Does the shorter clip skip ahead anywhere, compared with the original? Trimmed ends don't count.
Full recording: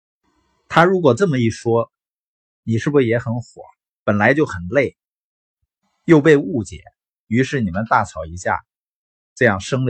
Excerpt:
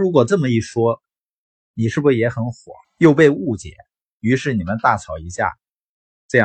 yes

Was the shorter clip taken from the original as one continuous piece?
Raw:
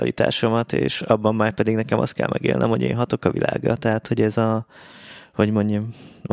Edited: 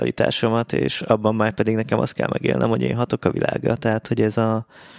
yes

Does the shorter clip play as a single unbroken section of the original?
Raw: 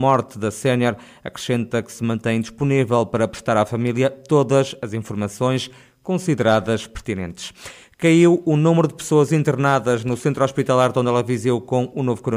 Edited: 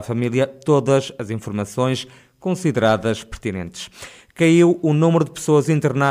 yes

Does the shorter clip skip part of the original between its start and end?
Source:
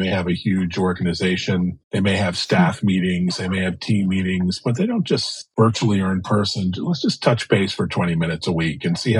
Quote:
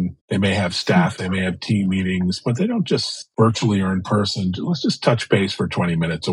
yes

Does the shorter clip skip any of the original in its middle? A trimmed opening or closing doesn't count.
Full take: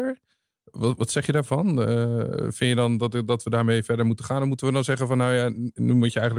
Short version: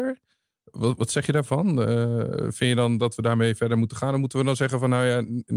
yes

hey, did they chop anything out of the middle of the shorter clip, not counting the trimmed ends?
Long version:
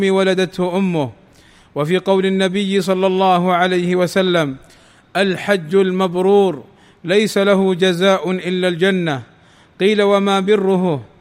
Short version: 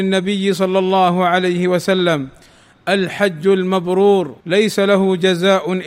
yes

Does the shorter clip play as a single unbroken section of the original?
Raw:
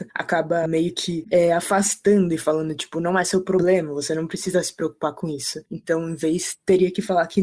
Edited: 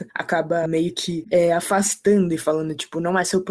yes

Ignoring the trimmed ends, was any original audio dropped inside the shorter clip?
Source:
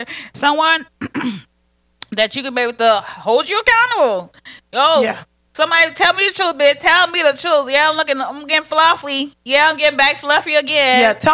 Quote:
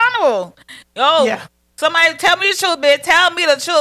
no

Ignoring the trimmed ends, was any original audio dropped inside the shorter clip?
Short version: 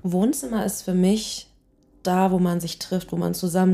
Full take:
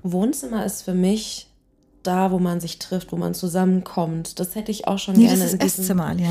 no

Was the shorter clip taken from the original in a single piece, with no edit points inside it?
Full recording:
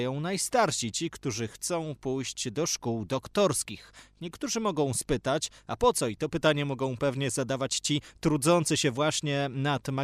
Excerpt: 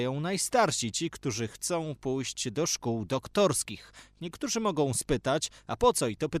yes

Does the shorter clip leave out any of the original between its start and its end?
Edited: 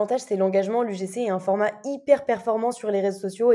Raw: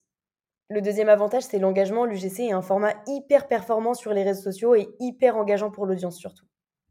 no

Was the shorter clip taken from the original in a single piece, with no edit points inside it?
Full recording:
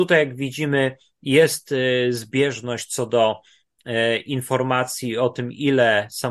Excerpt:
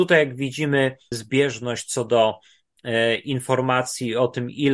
no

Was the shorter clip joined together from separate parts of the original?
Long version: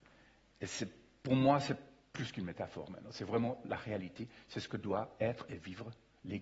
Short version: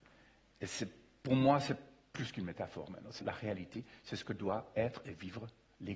yes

